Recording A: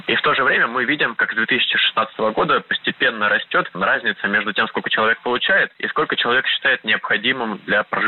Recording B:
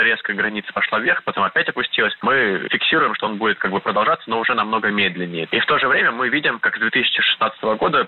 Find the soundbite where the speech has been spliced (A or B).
B